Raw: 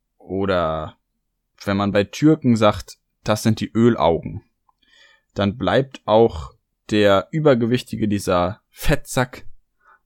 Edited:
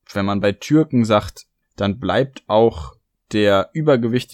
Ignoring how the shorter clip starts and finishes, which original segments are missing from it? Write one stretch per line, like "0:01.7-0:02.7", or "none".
0:03.1-0:05.2